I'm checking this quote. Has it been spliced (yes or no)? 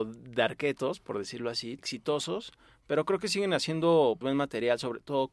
yes